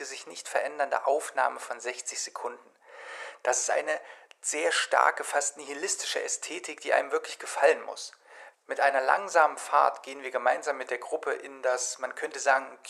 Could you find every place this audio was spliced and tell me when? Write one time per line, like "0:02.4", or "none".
0:08.5